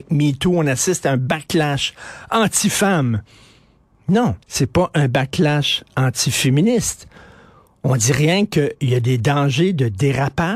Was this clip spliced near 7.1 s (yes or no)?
no